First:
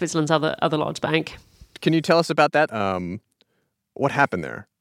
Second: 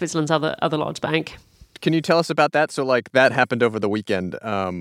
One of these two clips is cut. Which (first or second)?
first